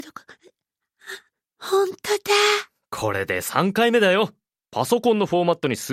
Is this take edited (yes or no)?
no